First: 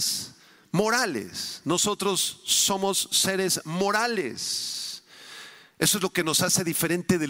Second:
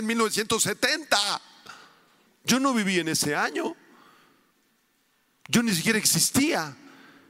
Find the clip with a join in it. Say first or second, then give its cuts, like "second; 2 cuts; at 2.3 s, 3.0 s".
second; 1 cut; at 2.3 s